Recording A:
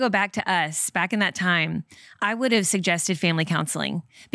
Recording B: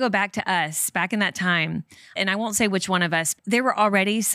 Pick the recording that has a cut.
B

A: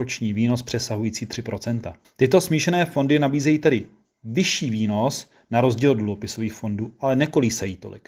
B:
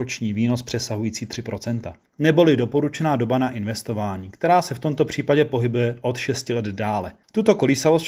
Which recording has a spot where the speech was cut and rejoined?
B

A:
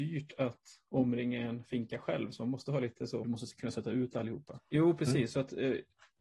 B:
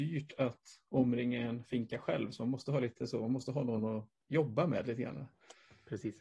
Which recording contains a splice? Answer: A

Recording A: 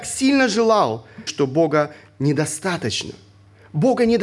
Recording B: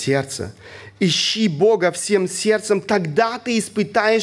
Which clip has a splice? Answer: A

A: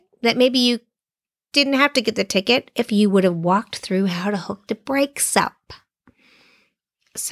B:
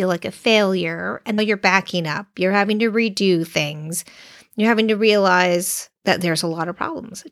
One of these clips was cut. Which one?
B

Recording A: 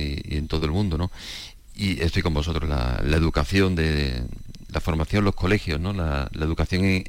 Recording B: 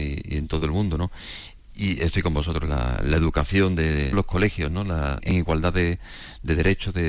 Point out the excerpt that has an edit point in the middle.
B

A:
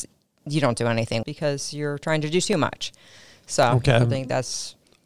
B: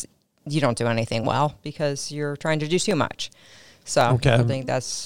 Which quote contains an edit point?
A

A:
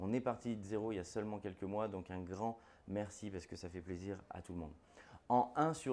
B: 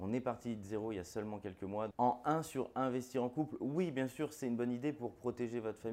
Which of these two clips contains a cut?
B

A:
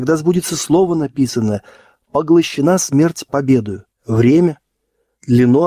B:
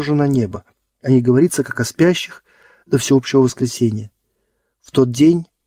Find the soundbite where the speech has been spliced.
A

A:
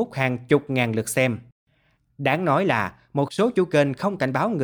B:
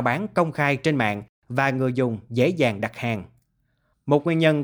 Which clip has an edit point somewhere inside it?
A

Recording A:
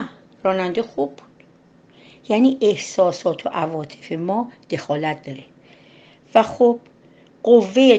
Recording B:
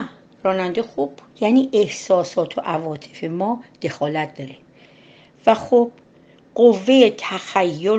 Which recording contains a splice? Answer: B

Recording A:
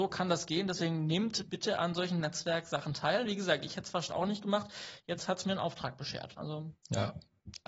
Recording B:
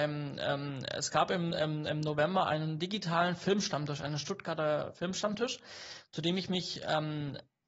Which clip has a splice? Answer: A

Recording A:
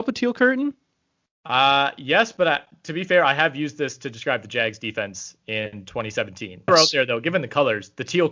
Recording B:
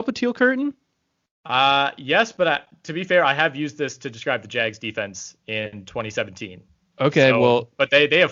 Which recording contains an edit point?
A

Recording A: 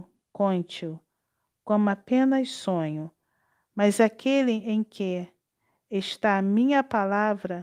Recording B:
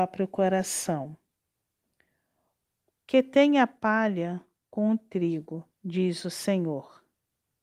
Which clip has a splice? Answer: B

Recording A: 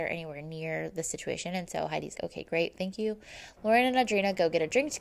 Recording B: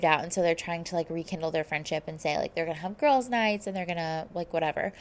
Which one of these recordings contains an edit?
A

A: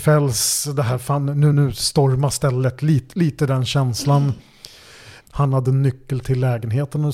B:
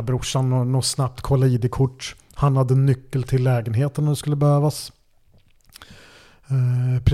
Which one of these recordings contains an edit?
A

